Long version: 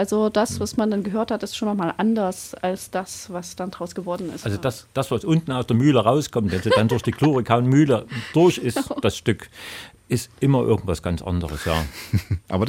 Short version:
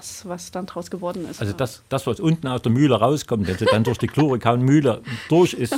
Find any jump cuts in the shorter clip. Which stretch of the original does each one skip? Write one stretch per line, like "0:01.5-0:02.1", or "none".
none